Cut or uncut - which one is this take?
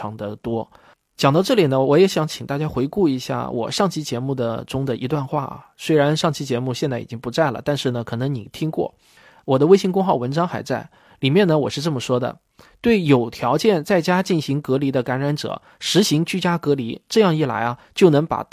uncut